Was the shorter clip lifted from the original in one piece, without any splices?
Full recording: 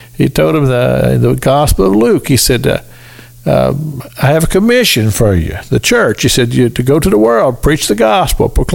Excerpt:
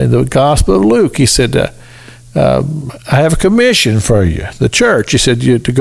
yes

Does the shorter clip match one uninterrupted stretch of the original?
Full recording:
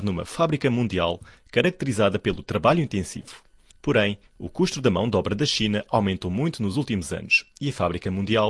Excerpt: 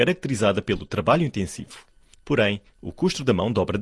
yes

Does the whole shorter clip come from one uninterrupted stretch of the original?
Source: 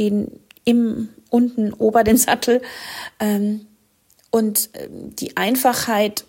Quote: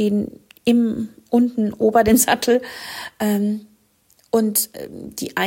yes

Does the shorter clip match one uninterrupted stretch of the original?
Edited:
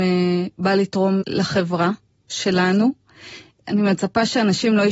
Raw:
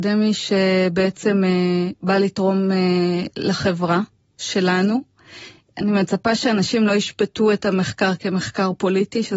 no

